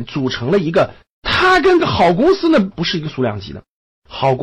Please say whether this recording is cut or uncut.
cut